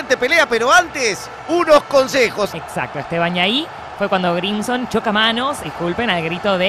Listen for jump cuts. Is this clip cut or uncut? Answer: cut